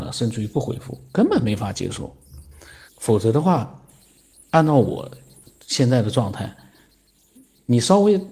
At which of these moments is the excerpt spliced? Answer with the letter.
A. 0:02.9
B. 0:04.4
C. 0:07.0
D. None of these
A